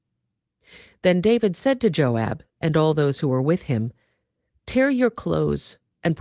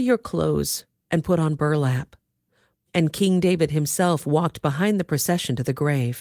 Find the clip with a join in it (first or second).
second